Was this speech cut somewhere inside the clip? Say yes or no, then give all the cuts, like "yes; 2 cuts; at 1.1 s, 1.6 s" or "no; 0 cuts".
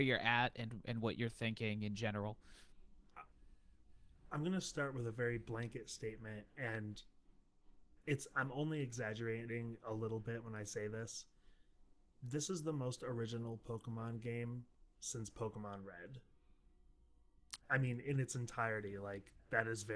yes; 1 cut; at 17.6 s